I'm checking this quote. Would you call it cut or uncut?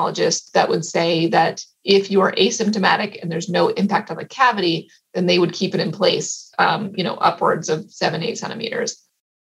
uncut